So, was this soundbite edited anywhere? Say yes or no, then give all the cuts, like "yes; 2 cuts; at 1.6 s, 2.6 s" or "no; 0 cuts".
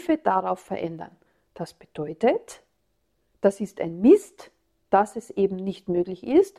no; 0 cuts